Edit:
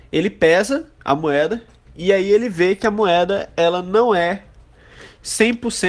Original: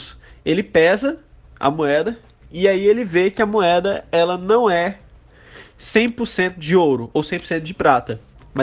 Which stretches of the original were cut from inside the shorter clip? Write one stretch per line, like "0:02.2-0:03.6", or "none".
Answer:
0:01.3-0:01.5

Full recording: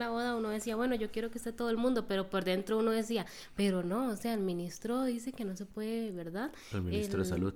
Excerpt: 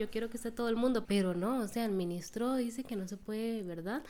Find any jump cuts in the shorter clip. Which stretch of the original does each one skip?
0:02.1-0:03.5

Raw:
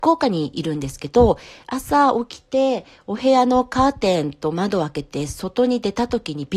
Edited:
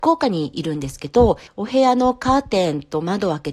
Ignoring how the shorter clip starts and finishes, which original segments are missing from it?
0:01.5-0:03.0

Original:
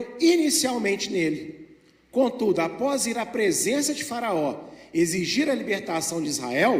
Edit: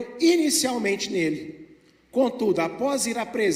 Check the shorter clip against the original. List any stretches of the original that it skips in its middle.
none

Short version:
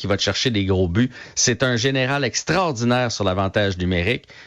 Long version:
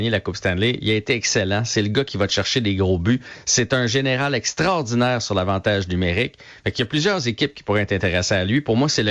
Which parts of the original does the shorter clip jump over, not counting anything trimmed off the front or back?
none

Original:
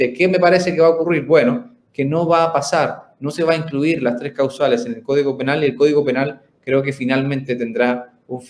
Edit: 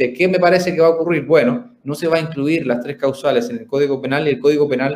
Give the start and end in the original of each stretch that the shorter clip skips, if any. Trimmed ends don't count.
0:01.8-0:03.2

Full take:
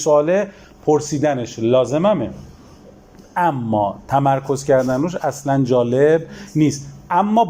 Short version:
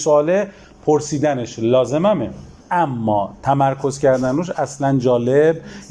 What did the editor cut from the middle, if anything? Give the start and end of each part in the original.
0:02.6-0:03.3

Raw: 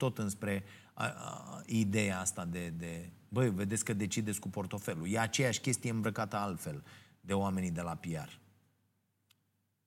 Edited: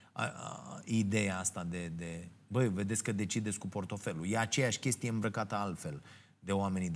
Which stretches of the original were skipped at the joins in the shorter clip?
none

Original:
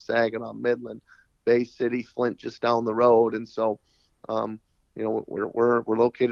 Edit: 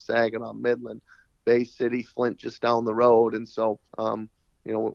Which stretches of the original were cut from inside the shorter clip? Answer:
0:03.9-0:04.2

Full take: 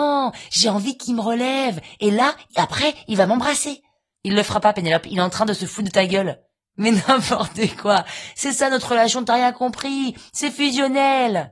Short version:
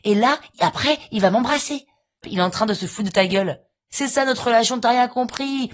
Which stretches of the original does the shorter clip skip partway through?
0:04.2-0:05.0
0:06.7-0:08.3

